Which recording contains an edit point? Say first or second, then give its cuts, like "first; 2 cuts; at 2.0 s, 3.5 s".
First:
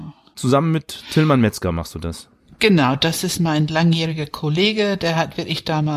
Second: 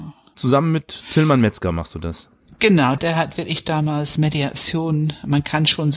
second; 1 cut; at 3.0 s